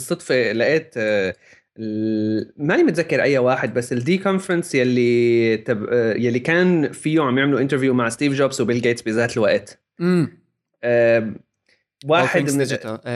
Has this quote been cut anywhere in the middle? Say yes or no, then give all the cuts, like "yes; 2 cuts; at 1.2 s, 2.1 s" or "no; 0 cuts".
no; 0 cuts